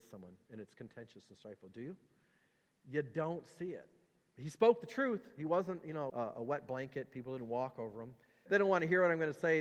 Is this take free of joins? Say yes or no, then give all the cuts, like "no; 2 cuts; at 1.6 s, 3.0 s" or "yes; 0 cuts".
no; 2 cuts; at 6.1 s, 8.5 s